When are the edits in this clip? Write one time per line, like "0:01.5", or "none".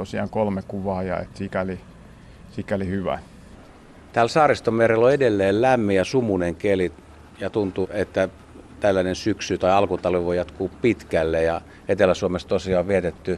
0:07.8